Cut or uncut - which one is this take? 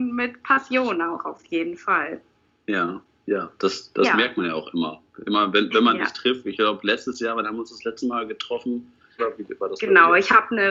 cut